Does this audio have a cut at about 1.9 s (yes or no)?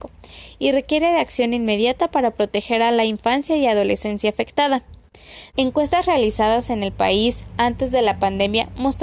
no